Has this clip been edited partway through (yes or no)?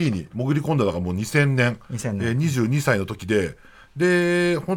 no